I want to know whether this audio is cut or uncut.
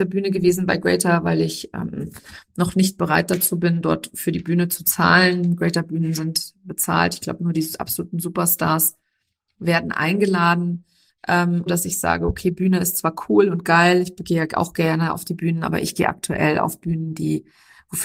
cut